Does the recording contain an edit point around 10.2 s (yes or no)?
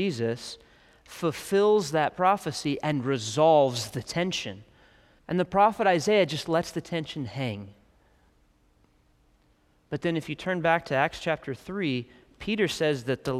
no